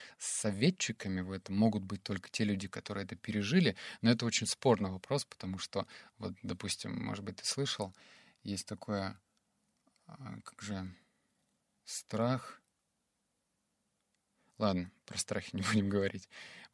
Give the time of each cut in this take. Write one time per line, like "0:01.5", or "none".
none